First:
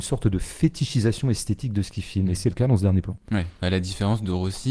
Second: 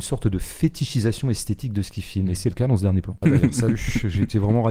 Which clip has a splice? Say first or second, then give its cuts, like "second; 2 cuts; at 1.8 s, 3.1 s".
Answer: second; 1 cut; at 3.2 s